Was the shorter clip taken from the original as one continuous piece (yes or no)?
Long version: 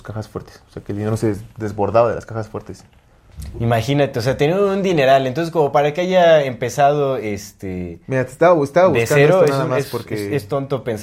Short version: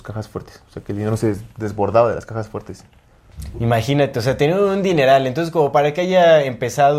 yes